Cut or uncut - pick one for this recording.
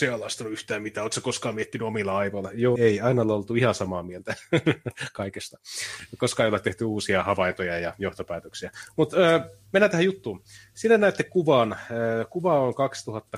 cut